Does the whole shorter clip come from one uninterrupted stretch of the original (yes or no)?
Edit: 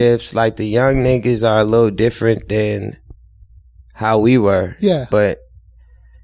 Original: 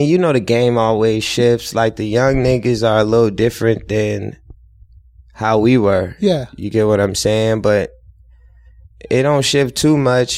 no